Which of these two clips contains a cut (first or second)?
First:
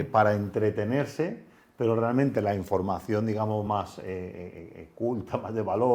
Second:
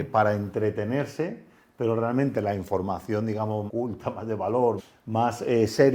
second